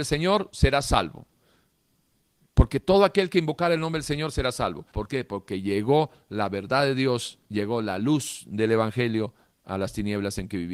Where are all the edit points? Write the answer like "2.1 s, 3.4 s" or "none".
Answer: 4.9 s, 7.4 s